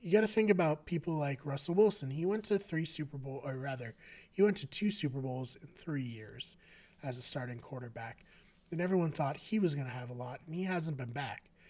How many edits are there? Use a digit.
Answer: 0